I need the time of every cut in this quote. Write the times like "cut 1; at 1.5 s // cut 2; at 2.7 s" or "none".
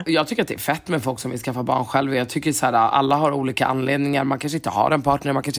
none